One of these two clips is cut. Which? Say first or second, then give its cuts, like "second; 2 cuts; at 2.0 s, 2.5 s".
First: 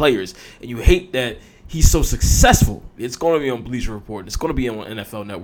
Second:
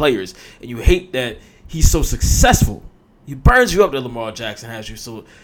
first; 2 cuts; at 3.0 s, 4.2 s